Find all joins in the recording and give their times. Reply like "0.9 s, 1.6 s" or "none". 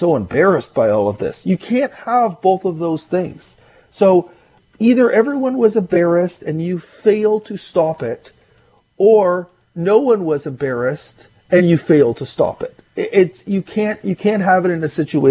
none